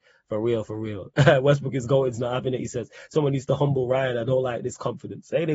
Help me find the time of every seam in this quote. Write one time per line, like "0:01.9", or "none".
none